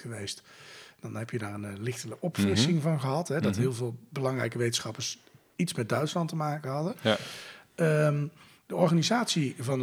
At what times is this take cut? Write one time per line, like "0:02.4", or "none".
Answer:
none